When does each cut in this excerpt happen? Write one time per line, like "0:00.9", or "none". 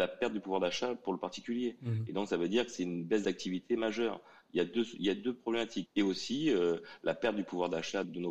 0:05.9

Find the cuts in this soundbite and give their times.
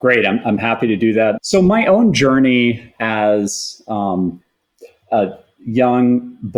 0:01.4

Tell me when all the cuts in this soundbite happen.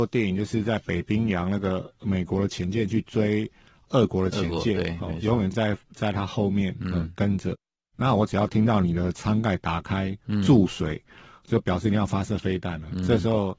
none

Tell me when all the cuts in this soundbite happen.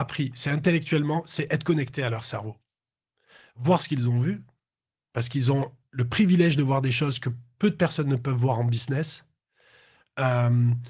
none

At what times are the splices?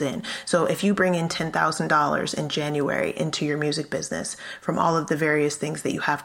none

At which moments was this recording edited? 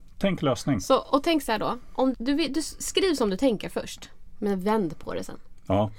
0:02.1

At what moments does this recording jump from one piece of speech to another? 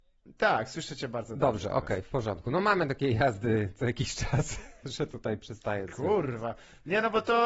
none

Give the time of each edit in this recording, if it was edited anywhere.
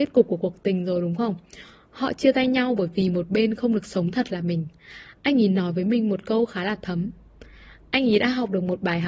none

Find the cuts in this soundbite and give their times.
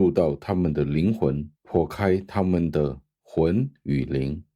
0:01.5

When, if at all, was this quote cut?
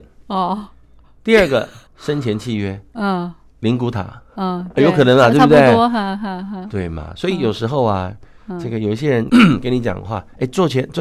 0:01.9
0:09.3

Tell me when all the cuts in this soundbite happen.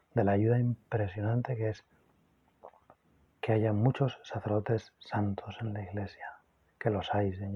none

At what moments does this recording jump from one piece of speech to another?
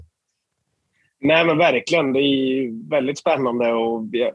none

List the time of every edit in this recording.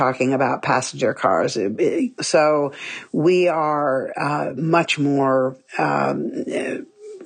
0:02.2

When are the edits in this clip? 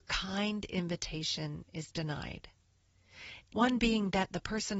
0:03.5

